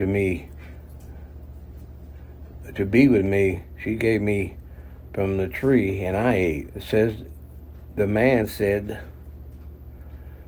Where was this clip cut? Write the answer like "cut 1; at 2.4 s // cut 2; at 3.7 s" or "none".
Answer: cut 1; at 2.6 s // cut 2; at 6.7 s